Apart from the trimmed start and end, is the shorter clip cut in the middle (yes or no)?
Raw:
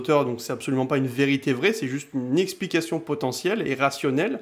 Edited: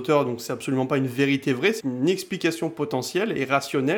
yes